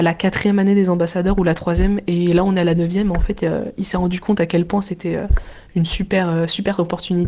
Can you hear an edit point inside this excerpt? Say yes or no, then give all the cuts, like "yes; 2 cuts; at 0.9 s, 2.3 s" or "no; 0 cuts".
no; 0 cuts